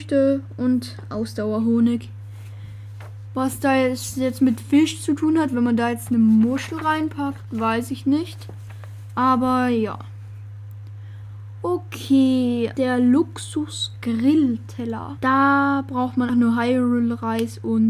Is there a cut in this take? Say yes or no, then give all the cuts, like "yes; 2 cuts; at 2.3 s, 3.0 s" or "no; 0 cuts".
yes; 3 cuts; at 12.7 s, 15.2 s, 16.3 s